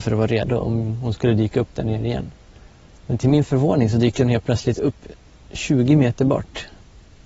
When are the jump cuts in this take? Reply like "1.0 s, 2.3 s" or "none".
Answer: none